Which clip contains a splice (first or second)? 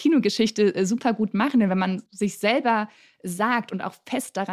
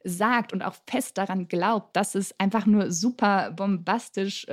first